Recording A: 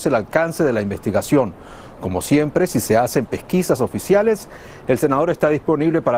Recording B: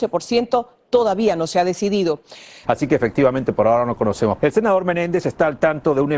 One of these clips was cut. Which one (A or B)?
B